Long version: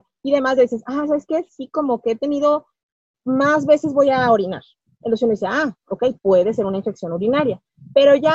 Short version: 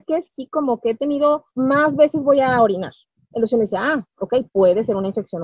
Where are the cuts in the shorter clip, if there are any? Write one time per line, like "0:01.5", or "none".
0:01.5